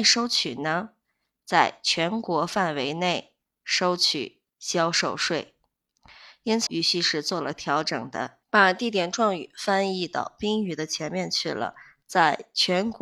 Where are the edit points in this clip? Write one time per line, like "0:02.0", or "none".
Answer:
0:06.7
0:08.4